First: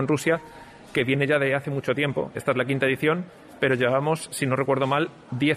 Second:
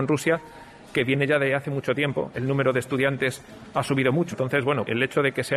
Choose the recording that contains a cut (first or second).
second